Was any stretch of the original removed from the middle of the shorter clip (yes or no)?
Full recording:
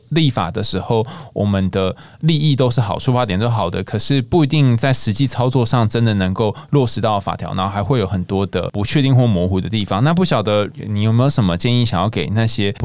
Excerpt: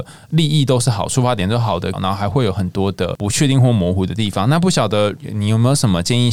yes